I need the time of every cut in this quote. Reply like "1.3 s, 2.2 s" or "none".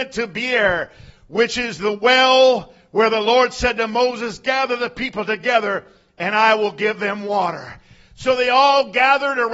none